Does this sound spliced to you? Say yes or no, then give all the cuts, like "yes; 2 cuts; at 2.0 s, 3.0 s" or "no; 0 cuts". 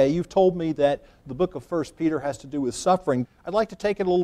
yes; 1 cut; at 3.3 s